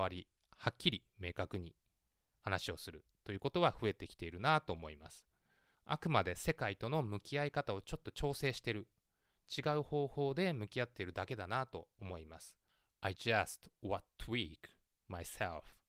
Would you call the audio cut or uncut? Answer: cut